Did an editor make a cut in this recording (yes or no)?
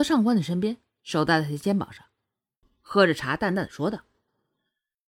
yes